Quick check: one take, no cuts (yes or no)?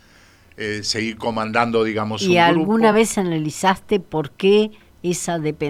yes